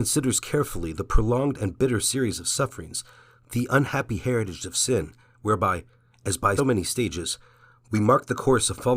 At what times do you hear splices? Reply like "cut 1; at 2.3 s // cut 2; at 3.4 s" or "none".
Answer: cut 1; at 6.6 s